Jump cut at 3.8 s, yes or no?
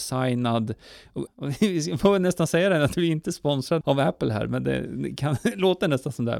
yes